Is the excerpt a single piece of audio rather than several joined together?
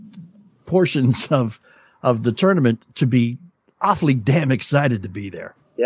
yes; 0 cuts

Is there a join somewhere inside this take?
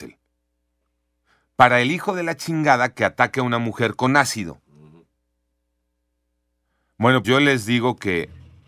yes; 1 cut; at 7.2 s

